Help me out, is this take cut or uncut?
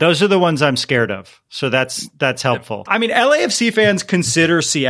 cut